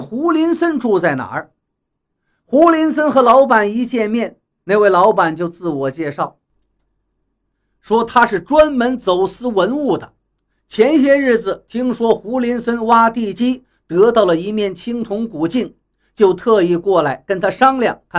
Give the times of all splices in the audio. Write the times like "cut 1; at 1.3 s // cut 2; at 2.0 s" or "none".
none

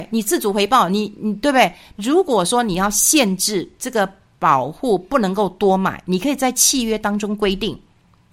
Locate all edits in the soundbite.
cut 1; at 1.9 s

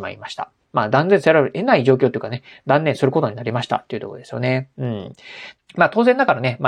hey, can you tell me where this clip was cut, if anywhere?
cut 1; at 5.6 s

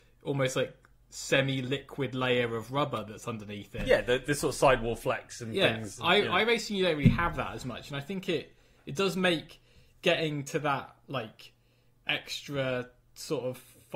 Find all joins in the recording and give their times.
none

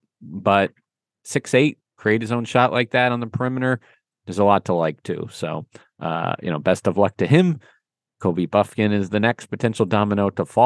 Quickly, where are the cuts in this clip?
cut 1; at 1.9 s

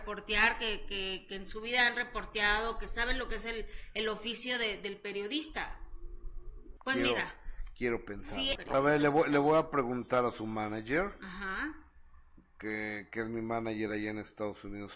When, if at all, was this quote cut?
cut 1; at 6.8 s // cut 2; at 8.6 s

